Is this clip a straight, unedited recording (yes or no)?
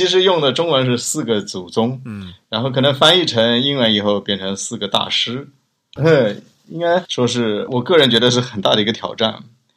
no